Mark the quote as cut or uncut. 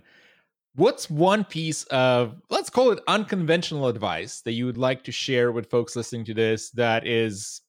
uncut